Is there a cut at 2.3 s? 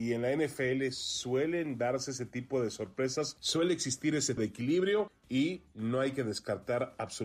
no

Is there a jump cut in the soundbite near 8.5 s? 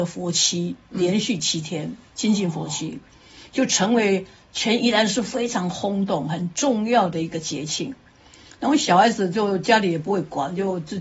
no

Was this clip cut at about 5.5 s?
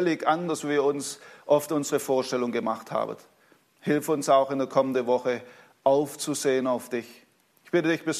no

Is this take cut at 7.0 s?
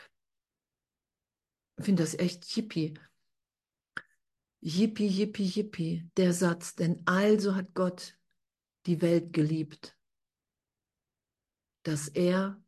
no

